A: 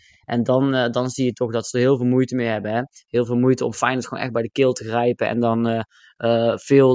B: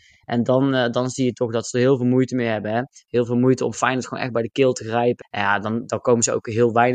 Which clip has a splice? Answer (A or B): B